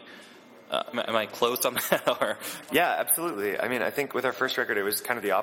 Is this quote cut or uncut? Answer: cut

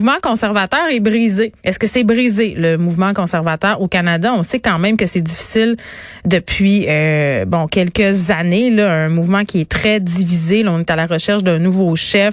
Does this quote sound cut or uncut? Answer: cut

